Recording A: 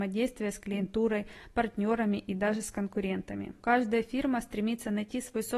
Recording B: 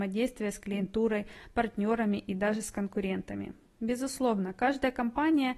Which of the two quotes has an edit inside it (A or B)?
A